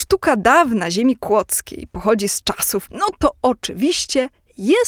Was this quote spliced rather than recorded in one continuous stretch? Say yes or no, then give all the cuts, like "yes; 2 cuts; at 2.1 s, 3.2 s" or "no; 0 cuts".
yes; 1 cut; at 2.9 s